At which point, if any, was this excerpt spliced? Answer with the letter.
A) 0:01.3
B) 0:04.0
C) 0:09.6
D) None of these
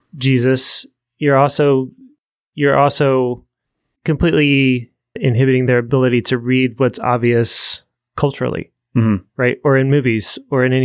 D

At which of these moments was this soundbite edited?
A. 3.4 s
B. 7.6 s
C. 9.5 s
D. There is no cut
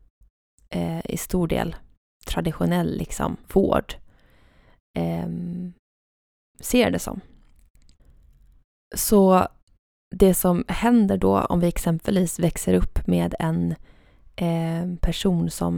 A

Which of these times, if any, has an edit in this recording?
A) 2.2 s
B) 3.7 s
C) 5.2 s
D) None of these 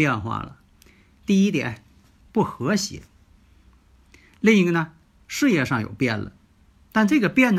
A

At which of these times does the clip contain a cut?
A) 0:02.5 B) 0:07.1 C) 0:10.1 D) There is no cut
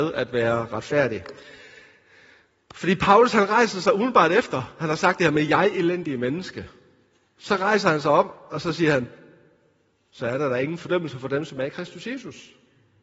D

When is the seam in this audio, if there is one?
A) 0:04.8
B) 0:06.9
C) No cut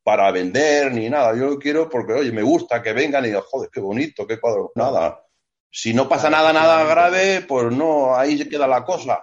A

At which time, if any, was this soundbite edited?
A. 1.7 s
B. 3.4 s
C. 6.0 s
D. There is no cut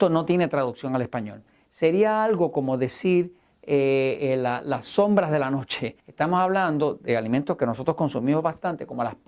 C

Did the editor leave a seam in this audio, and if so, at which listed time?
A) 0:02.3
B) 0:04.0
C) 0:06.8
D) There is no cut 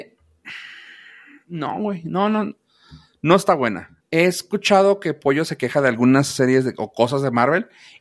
B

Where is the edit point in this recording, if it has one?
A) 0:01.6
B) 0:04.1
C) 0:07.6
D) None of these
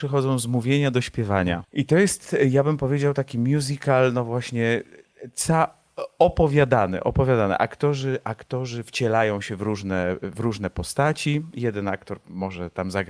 A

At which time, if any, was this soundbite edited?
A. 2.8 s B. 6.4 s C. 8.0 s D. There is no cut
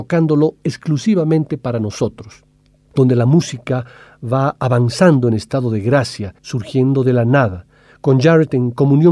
B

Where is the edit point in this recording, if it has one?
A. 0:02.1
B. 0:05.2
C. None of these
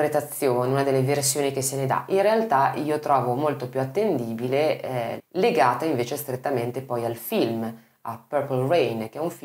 B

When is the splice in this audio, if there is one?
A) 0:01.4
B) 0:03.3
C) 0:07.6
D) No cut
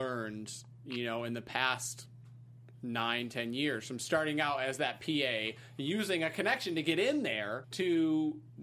C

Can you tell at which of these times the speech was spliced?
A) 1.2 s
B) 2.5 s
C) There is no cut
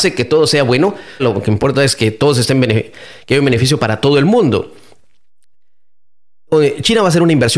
A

